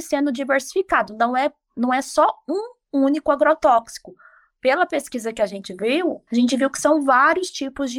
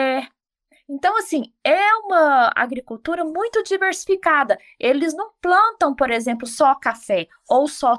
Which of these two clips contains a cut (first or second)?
first